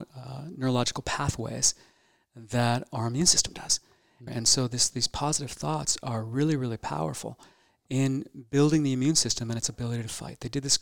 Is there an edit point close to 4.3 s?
yes; 1 cut; at 4.3 s

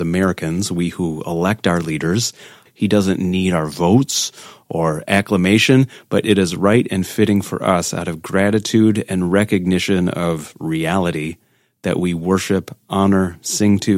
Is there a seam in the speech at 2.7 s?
yes; 1 cut; at 2.7 s

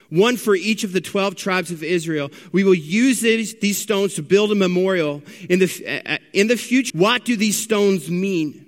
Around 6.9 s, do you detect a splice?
yes; 1 cut; at 6.9 s

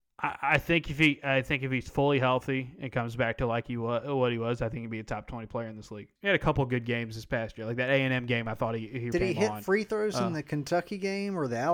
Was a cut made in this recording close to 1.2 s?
no; 2 cuts; at 6.2 s, 9.1 s

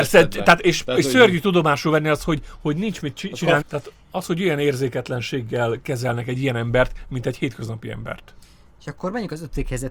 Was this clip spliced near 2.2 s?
no; 1 cut; at 3.6 s

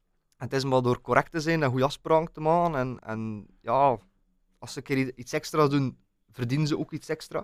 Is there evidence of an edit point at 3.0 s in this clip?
yes; 1 cut; at 3.0 s

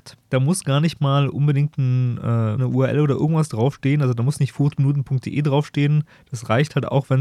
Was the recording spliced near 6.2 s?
no; 1 cut; at 2.6 s

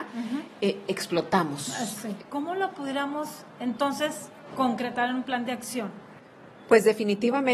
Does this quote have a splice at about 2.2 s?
yes; 1 cut; at 2.2 s

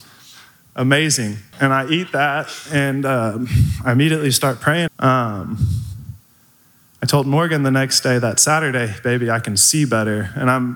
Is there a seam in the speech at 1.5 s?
yes; 2 cuts; at 1.5 s, 4.9 s

